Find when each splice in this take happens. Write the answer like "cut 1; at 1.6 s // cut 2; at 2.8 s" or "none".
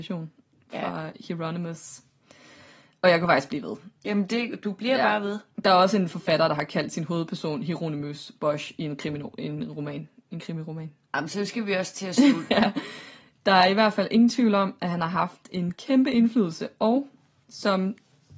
cut 1; at 12.5 s